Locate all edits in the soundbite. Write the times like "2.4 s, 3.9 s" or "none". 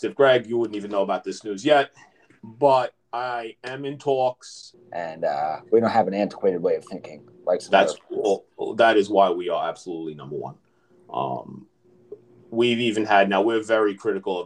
4.7 s